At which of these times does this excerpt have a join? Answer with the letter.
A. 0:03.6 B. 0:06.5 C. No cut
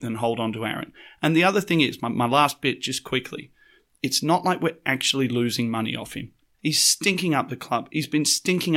B